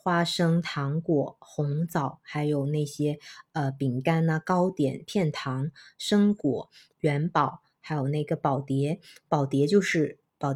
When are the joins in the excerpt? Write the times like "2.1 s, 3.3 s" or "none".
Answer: 6.9 s